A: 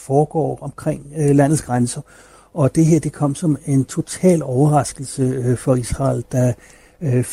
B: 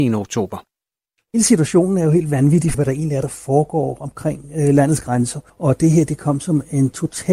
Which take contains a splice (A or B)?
B